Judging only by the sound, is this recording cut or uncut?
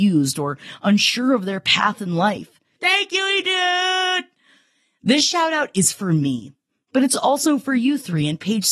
cut